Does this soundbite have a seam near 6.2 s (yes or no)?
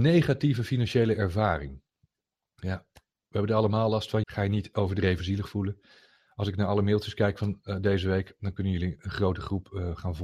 no